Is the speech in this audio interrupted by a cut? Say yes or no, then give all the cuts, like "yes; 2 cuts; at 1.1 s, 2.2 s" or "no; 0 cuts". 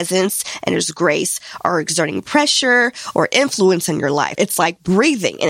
yes; 1 cut; at 4.3 s